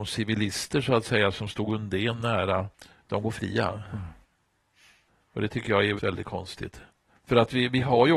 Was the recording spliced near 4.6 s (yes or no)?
no